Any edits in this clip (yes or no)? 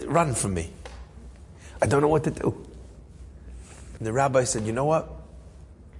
yes